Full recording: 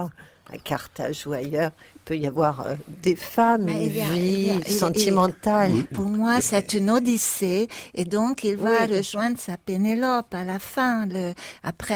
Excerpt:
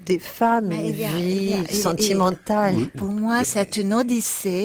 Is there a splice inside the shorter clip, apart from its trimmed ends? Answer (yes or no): no